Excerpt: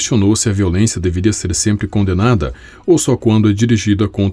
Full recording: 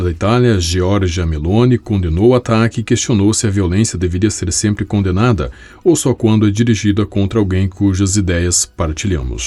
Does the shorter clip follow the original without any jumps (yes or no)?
yes